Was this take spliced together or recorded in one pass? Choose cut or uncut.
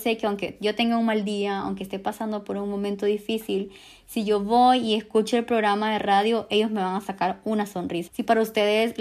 cut